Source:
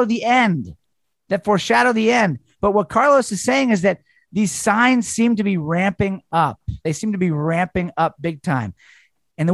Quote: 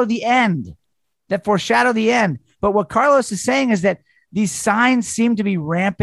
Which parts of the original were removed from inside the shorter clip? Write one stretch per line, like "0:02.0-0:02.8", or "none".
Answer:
none